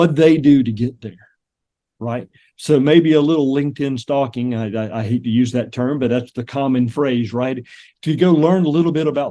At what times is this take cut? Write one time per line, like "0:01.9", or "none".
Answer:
none